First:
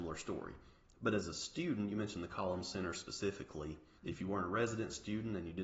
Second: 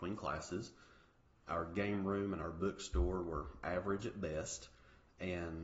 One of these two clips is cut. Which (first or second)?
first